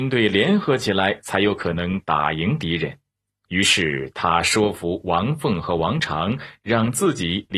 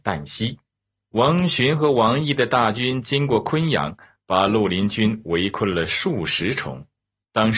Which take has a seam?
second; 1 cut; at 1.0 s

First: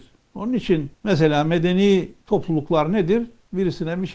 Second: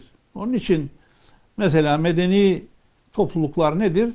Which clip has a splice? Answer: first; 2 cuts; at 0.9 s, 2.2 s

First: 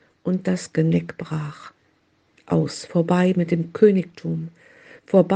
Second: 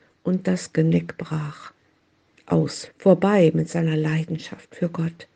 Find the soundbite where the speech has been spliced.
second; 1 cut; at 2.9 s

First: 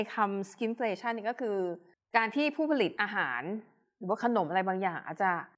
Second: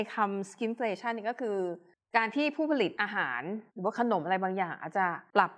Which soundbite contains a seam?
second; 1 cut; at 3.7 s

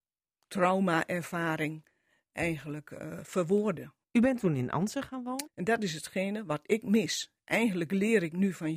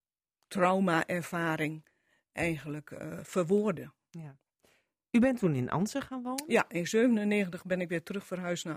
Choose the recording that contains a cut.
first; 2 cuts; at 4.0 s, 5.5 s

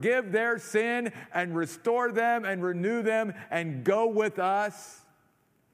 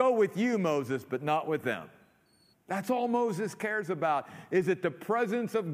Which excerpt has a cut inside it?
second; 1 cut; at 2.5 s

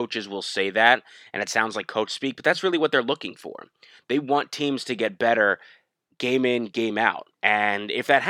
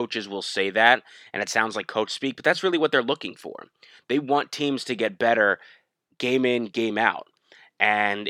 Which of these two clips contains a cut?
first; 1 cut; at 7.3 s

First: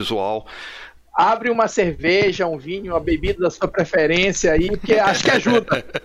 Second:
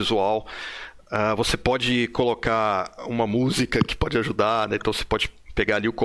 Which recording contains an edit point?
first; 1 cut; at 1.0 s

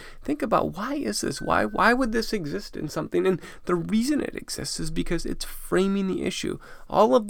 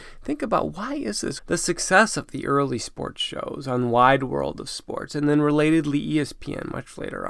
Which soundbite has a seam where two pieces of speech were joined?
second; 1 cut; at 1.4 s

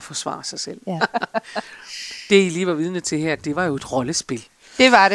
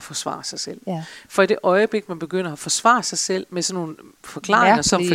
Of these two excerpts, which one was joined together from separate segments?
first; 2 cuts; at 1.0 s, 3.4 s

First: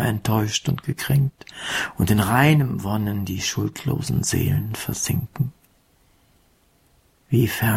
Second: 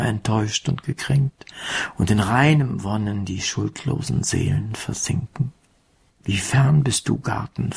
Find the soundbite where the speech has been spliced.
second; 1 cut; at 6.1 s

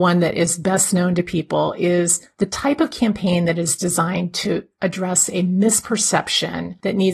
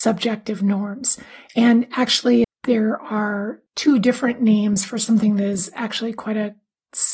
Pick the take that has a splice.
second; 2 cuts; at 2.4 s, 3.7 s

